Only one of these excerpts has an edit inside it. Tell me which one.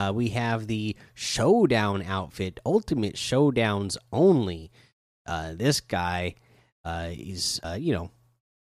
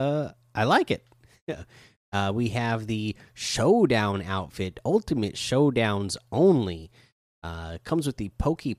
first; 2 cuts; at 5.2 s, 7.6 s

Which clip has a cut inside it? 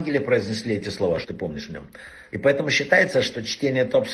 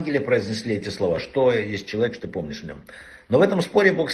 first; 2 cuts; at 1.2 s, 2.3 s

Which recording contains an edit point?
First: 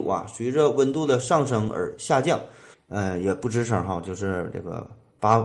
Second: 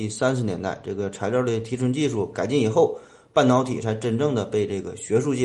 first; 1 cut; at 2.7 s

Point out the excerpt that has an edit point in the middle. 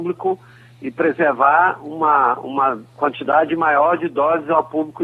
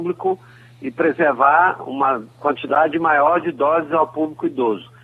second; 1 cut; at 1.8 s

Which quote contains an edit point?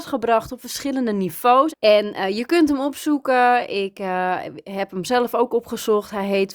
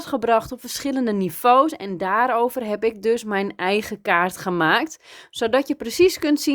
first; 1 cut; at 1.7 s

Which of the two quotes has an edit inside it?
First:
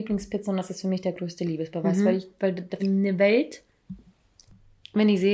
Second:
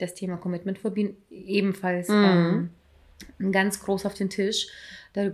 first; 1 cut; at 2.8 s

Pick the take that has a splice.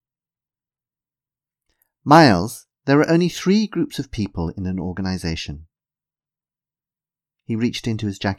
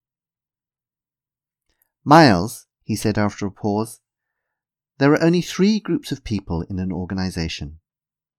first; 1 cut; at 2.8 s

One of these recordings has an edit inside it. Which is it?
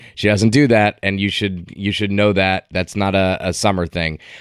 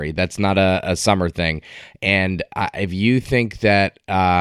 first; 1 cut; at 2.7 s

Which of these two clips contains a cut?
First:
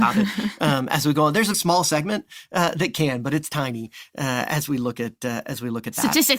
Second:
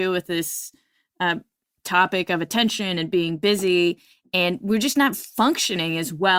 first; 1 cut; at 1.5 s

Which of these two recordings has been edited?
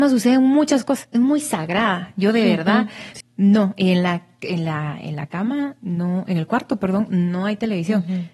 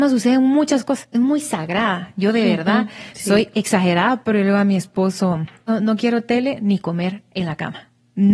first; 1 cut; at 3.2 s

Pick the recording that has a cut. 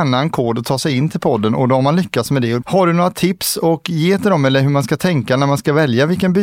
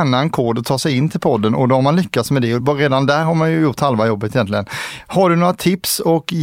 first; 1 cut; at 2.6 s

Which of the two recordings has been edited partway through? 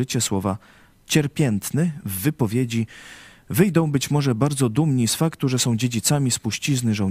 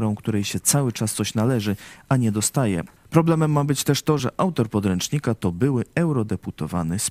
second; 2 cuts; at 3.0 s, 4.2 s

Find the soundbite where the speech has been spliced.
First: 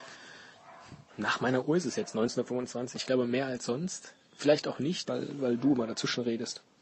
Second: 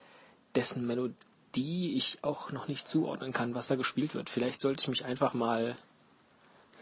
first; 2 cuts; at 2.9 s, 5.1 s

